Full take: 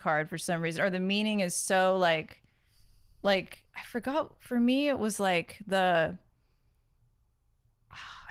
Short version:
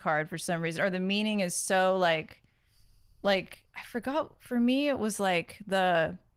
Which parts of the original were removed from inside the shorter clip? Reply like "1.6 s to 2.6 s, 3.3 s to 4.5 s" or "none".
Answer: none